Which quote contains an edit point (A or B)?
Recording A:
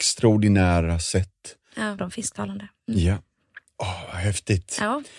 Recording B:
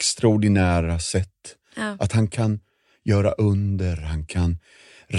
A